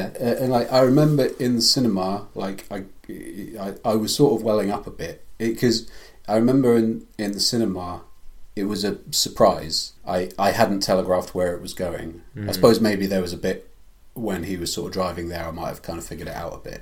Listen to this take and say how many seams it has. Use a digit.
1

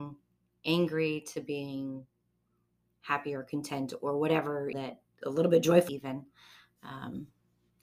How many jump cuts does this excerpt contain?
2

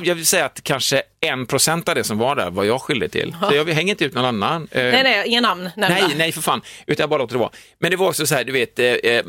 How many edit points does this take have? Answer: 0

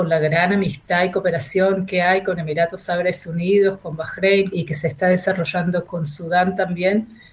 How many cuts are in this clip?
2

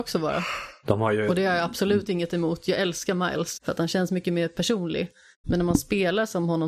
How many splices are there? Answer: 2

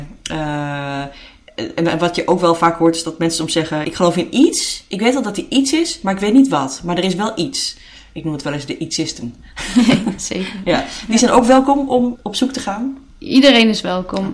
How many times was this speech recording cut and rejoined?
2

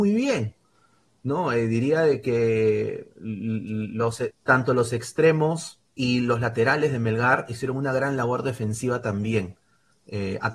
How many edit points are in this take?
2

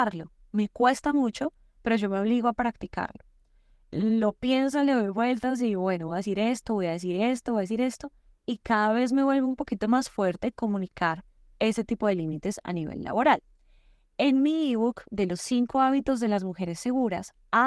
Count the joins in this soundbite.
0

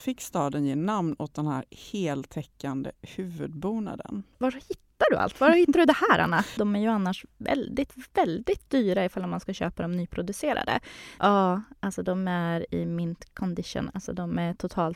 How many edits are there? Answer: 2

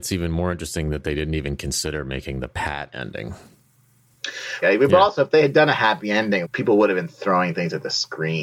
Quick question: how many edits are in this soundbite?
2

